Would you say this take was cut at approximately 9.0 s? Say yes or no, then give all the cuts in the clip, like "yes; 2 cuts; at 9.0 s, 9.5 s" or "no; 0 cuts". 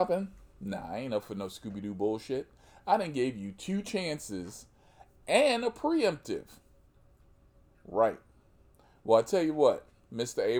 no; 1 cut; at 7.7 s